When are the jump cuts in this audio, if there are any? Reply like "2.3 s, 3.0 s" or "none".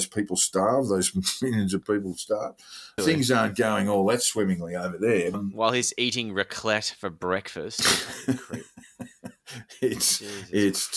3.0 s, 5.3 s